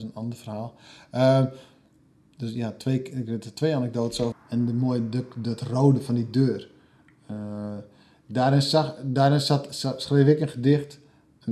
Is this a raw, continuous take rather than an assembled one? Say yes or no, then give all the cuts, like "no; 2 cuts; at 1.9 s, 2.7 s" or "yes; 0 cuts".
no; 1 cut; at 4.3 s